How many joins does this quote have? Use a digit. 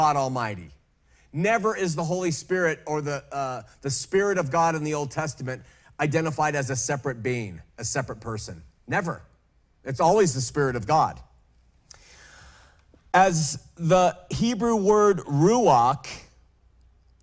0